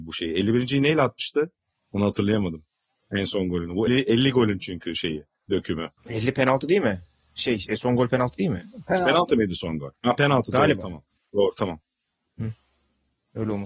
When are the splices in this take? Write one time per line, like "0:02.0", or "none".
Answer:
0:03.9
0:06.0